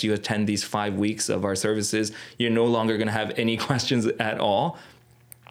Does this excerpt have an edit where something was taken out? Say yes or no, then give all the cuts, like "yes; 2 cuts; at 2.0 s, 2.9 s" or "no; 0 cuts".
no; 0 cuts